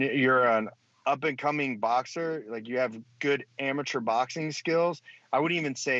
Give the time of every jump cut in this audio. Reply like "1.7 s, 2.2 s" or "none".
none